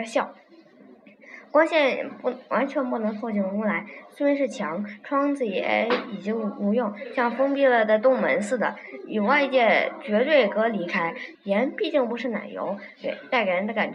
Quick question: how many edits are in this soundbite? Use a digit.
1